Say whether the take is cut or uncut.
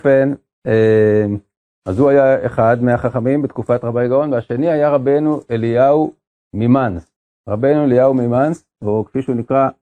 uncut